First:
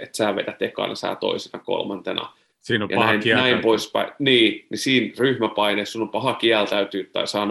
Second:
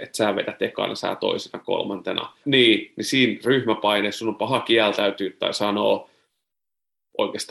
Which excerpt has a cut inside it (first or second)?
second